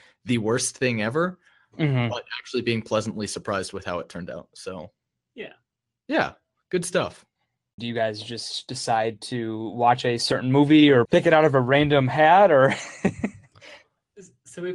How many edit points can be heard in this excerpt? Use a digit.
2